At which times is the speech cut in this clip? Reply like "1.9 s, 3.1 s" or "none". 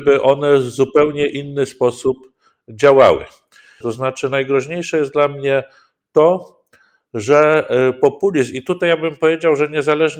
3.8 s